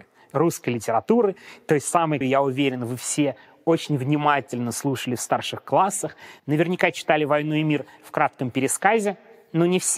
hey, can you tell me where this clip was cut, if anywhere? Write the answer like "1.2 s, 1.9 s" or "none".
2.2 s